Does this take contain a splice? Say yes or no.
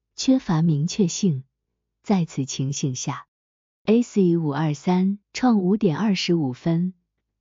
yes